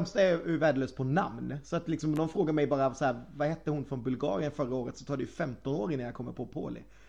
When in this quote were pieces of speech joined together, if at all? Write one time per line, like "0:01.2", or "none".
none